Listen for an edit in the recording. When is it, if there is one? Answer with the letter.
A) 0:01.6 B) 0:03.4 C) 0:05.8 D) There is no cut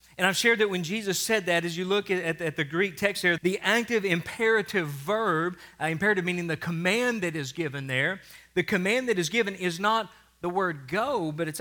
B